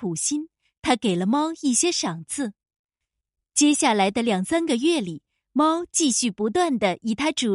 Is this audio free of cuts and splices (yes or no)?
yes